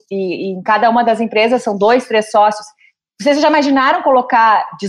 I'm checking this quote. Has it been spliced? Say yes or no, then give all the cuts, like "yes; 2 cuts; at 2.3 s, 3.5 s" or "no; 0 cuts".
no; 0 cuts